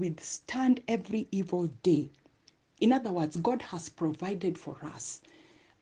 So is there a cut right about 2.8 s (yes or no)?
yes